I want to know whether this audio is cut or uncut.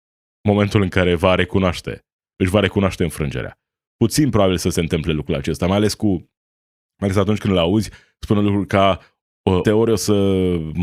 cut